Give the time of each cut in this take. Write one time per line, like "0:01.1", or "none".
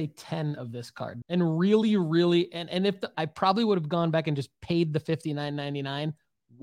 0:01.2
0:03.1